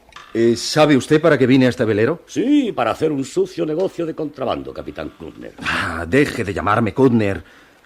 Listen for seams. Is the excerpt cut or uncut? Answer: uncut